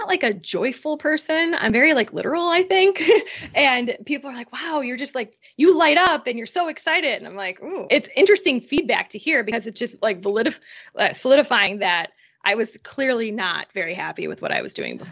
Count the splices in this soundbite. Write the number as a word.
one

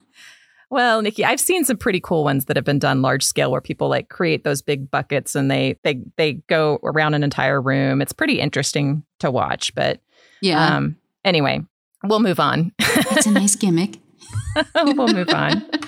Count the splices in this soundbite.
one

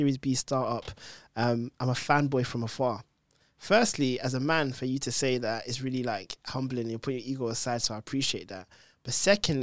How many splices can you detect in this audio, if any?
zero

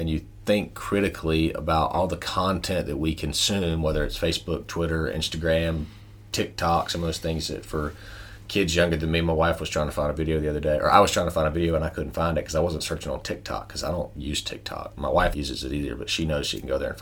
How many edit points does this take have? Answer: one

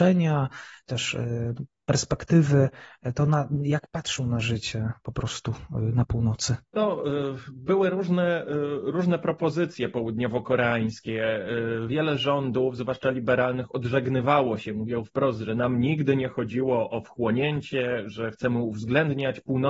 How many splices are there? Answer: one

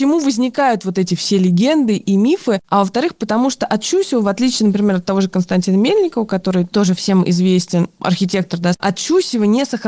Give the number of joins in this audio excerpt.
two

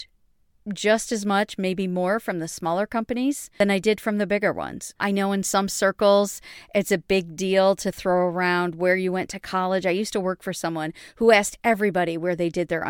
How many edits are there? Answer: one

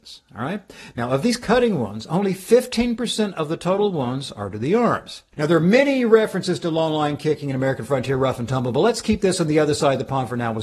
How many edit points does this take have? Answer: one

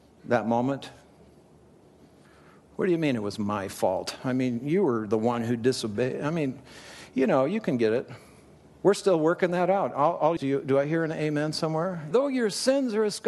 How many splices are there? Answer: two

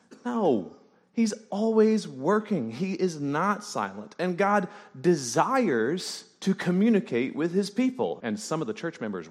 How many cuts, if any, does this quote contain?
one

